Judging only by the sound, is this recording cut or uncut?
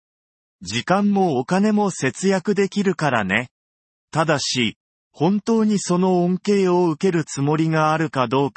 uncut